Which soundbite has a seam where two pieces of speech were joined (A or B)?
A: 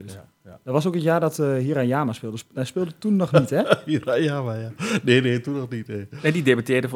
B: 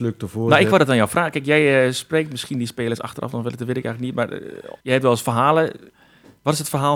B